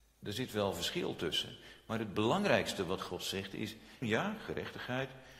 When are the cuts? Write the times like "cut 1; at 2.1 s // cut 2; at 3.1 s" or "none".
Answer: cut 1; at 4.0 s